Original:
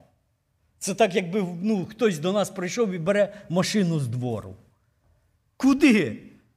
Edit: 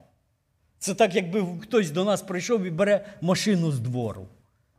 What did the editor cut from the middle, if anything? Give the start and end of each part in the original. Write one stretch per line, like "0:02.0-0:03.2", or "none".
0:01.6-0:01.9